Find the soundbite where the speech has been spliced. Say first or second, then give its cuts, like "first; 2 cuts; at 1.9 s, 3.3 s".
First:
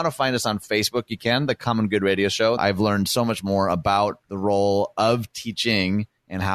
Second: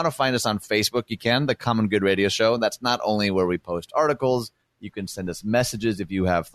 first; 2 cuts; at 2.6 s, 4.2 s